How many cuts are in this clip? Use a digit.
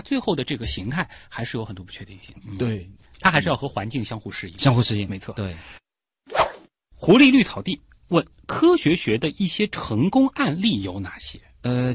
0